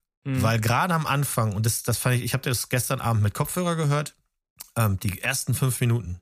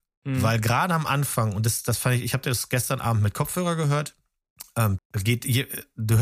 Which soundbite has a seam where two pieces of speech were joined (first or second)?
second